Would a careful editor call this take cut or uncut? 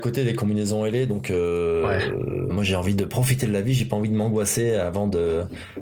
cut